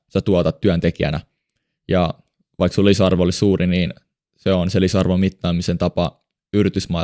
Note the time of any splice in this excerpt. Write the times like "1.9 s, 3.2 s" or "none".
none